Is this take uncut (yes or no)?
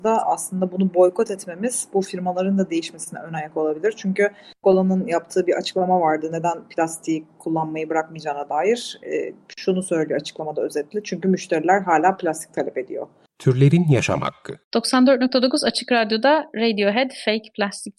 no